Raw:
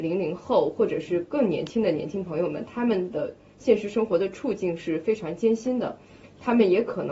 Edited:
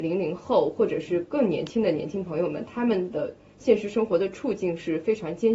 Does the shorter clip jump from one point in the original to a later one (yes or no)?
no